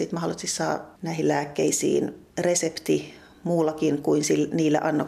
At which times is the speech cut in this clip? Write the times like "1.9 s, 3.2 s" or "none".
1.0 s, 2.3 s

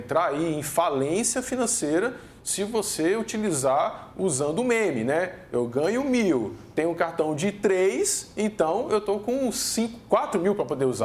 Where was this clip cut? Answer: none

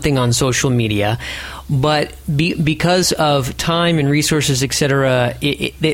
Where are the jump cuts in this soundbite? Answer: none

